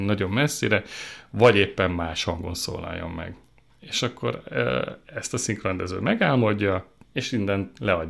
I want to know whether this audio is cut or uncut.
cut